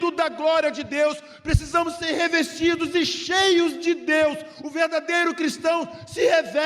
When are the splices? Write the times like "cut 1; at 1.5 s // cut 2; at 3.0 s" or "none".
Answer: none